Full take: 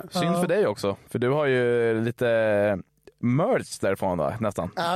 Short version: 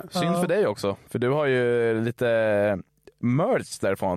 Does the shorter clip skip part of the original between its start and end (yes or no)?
no